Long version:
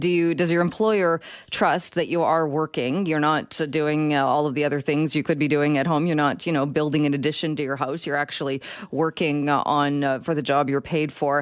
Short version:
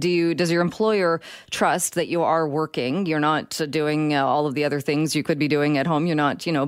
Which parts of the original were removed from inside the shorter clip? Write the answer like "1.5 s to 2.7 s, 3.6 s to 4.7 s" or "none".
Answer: none